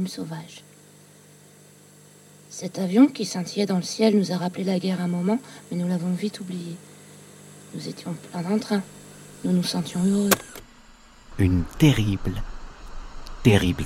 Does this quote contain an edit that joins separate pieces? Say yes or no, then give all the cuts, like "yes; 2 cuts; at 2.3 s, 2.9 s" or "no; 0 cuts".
yes; 1 cut; at 11.3 s